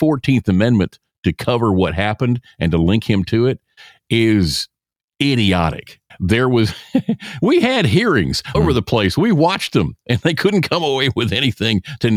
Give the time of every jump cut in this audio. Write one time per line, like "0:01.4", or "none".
0:06.1
0:08.5